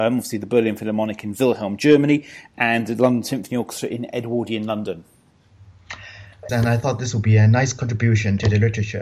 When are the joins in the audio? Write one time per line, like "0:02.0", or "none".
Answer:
0:06.5